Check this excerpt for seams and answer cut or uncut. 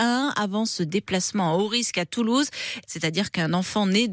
cut